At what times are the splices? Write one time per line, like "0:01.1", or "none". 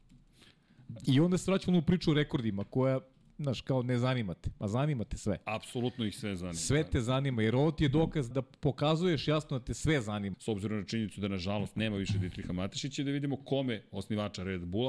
0:08.3
0:10.3